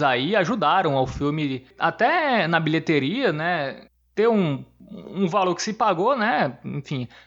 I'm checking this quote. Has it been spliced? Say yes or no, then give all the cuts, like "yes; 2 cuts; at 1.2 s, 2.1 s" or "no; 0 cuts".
no; 0 cuts